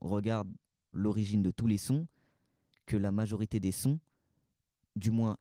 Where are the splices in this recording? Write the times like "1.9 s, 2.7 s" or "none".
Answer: 0.9 s